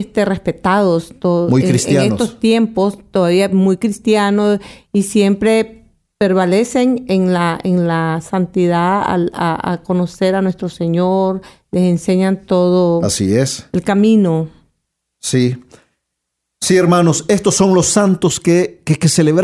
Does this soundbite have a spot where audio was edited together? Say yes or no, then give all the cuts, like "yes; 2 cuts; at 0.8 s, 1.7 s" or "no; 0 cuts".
no; 0 cuts